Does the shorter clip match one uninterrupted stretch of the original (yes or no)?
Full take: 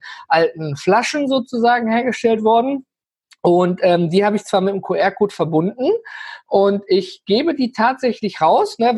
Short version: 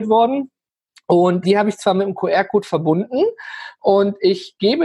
no